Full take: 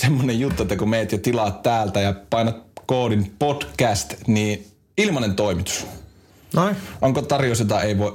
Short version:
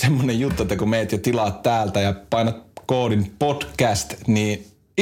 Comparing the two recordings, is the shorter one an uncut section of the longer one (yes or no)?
yes